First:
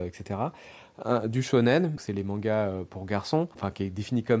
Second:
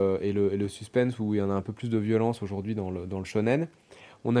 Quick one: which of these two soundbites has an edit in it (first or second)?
first